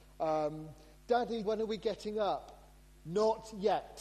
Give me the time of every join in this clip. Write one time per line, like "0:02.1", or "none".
0:01.4